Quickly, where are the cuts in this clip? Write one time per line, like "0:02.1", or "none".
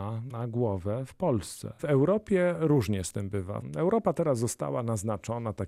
none

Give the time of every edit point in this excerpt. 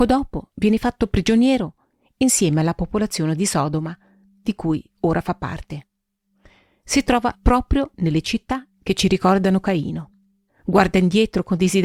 0:10.5

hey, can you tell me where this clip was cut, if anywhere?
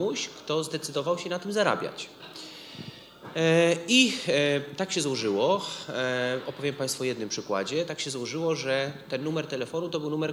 none

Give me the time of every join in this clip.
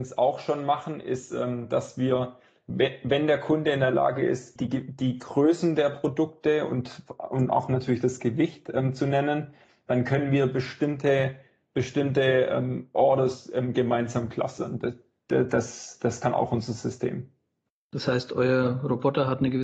0:04.6

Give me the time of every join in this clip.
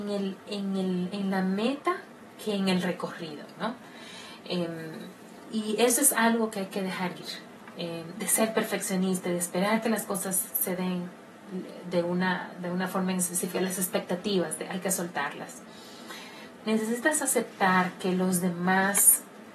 0:08.1
0:16.6

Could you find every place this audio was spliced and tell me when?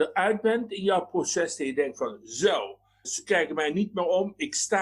0:03.0

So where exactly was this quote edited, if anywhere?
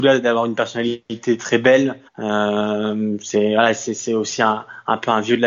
0:02.1

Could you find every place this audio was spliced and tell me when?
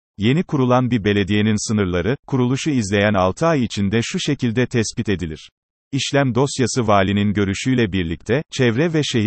0:05.8

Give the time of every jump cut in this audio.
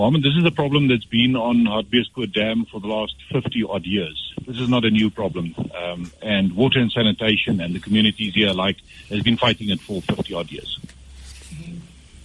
0:06.2

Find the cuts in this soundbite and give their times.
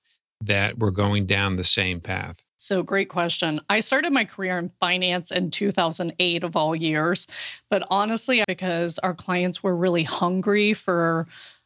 0:02.5
0:08.4

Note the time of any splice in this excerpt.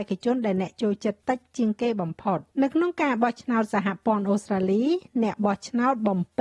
0:01.2
0:02.5

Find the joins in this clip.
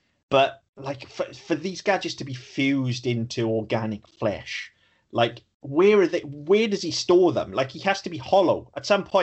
none

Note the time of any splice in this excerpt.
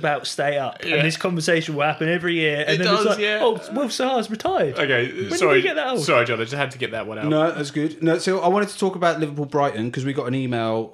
none

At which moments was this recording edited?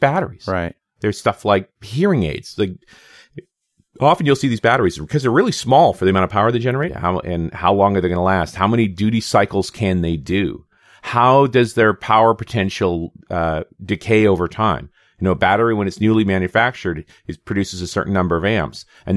0:06.9

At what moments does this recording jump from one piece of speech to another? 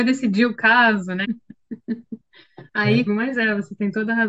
0:01.2
0:03.1

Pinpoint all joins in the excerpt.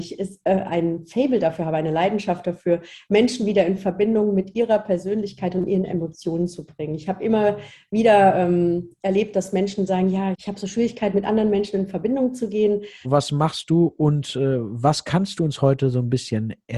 0:10.3
0:13.0

